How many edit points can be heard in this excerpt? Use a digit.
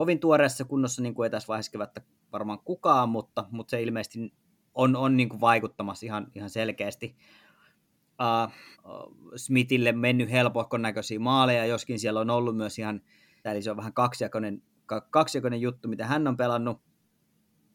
2